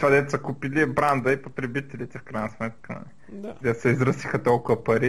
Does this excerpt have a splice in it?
no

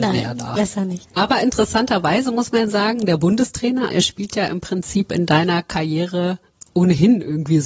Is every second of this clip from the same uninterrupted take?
no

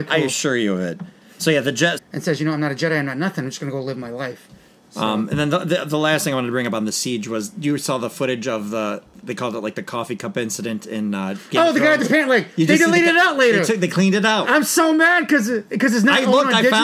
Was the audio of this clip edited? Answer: yes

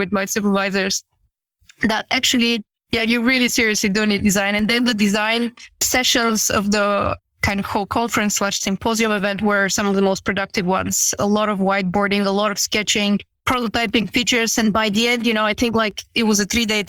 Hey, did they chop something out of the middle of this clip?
yes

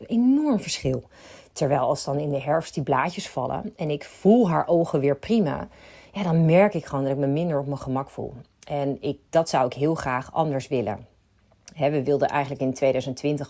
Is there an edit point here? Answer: no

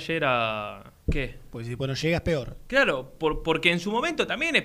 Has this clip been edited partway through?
yes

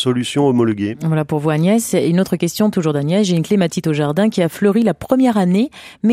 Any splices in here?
no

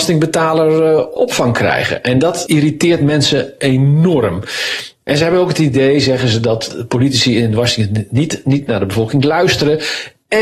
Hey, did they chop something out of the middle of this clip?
no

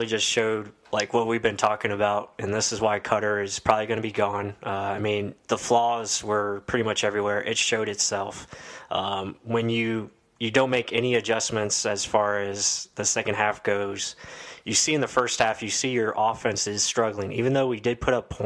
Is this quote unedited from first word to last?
yes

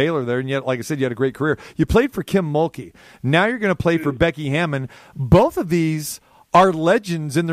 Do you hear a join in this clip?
no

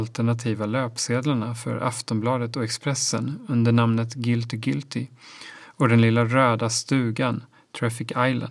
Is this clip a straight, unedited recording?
yes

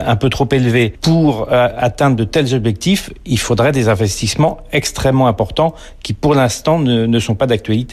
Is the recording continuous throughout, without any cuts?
yes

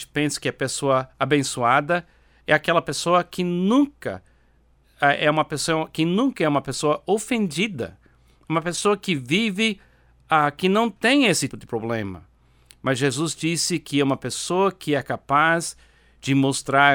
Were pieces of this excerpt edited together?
yes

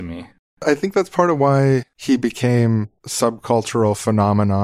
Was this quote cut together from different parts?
no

